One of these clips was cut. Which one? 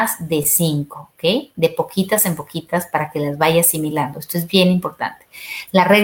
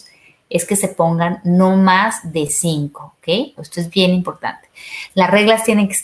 second; 1 cut; at 3.6 s

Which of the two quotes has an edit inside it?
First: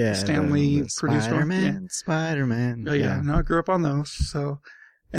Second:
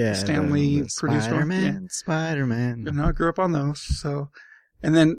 second; 1 cut; at 2.9 s

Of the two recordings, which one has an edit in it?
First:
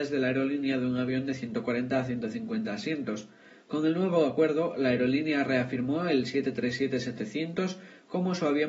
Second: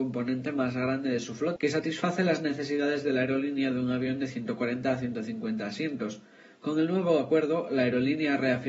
second; 1 cut; at 1.6 s

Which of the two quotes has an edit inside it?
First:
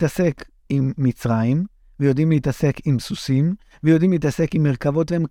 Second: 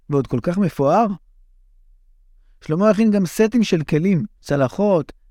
second; 1 cut; at 4.4 s

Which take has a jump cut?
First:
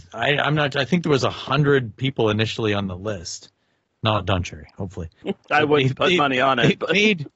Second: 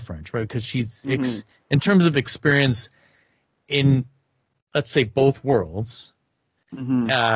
first; 1 cut; at 5.2 s

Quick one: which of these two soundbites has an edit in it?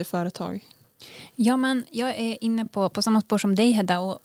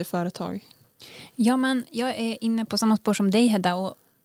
second; 1 cut; at 2.7 s

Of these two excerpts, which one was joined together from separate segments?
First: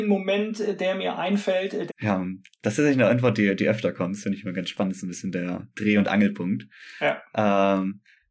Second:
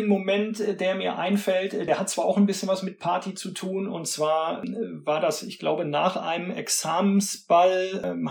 first; 1 cut; at 1.9 s

